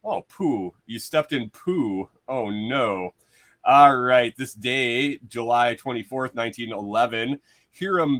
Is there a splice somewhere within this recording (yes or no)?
no